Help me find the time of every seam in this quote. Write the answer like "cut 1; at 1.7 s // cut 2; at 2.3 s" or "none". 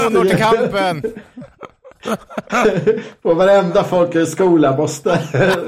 none